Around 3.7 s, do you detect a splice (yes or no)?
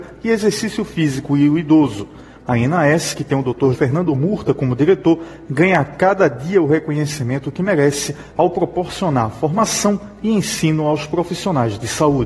yes